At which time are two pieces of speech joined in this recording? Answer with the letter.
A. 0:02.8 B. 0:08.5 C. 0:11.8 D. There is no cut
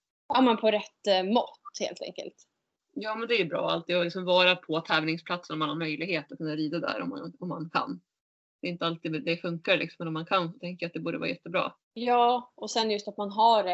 C